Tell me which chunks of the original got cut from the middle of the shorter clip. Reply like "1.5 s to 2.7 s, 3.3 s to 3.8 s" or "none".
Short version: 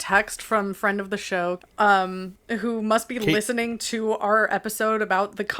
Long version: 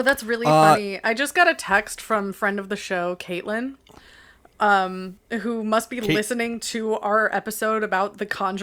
3.2 s to 4.4 s